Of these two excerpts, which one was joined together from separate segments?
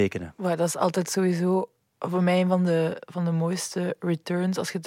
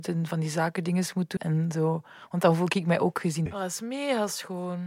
second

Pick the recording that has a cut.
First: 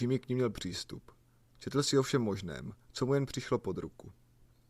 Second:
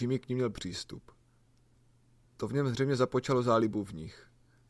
first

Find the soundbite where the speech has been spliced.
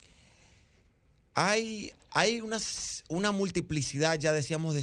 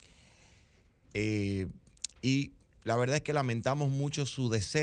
second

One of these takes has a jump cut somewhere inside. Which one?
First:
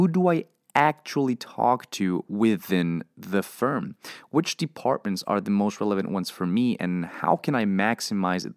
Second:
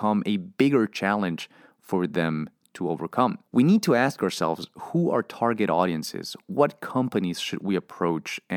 second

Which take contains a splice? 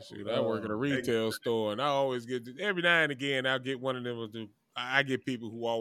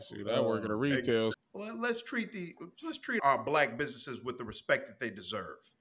second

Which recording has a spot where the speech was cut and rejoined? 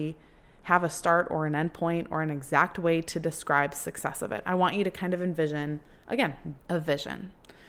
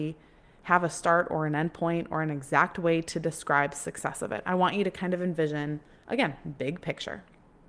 first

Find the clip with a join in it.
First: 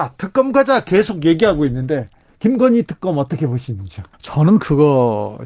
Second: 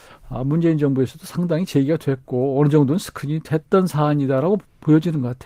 first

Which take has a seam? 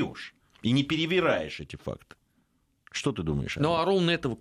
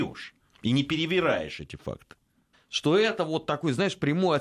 second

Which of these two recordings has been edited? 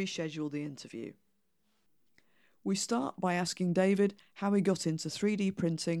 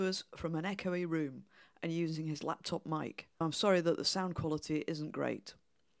second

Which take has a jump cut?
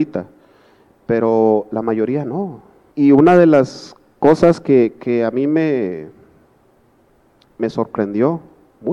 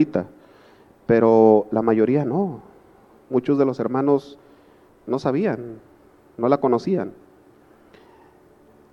first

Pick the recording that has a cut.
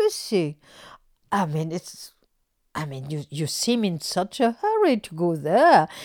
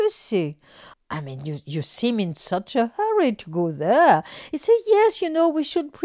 second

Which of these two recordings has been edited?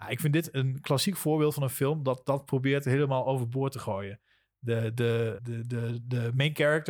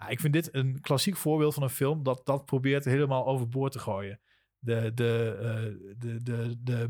first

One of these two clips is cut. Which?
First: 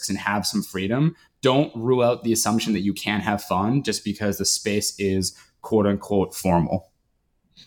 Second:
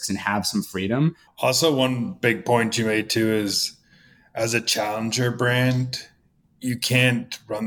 second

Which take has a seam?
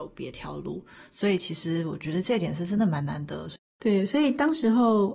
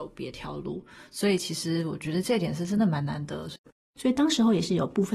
second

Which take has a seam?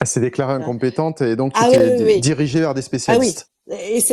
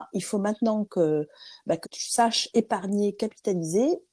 second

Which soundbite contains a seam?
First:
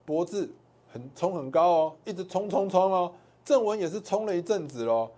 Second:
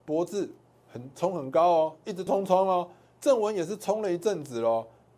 second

